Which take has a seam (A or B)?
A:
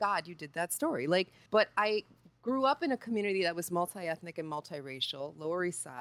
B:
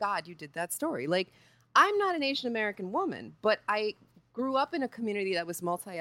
A